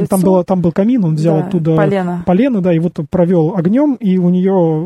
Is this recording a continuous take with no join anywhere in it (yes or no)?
yes